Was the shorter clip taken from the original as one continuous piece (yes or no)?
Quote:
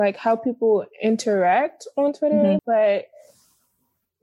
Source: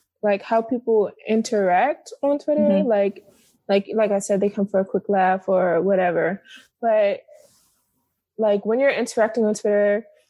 no